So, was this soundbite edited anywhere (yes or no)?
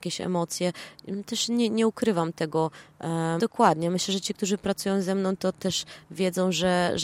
yes